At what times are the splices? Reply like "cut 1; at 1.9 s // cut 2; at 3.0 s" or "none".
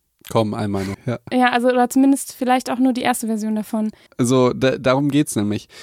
cut 1; at 0.9 s // cut 2; at 4.1 s